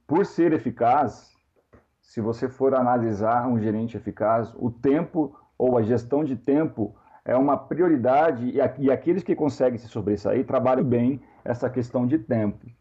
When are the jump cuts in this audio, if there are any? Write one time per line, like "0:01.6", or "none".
0:10.8